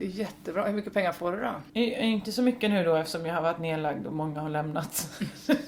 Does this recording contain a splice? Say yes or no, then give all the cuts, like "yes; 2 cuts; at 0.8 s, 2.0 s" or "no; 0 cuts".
yes; 1 cut; at 1.7 s